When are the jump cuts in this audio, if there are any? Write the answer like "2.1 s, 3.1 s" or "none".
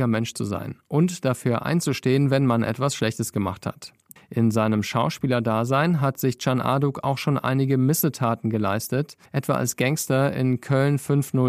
4.2 s, 9.3 s